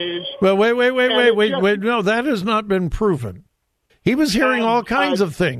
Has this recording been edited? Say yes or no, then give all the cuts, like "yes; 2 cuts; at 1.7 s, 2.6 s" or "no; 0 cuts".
yes; 1 cut; at 3.9 s